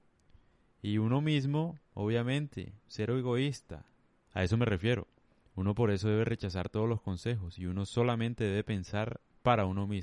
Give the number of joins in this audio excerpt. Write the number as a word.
one